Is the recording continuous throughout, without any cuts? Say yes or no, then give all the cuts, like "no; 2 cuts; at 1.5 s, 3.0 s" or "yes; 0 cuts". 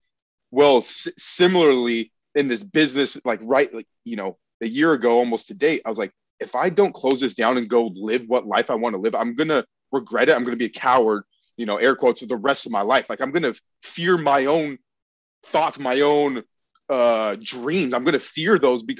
yes; 0 cuts